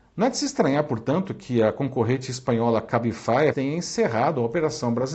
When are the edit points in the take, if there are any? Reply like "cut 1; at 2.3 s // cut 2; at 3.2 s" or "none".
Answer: cut 1; at 3.5 s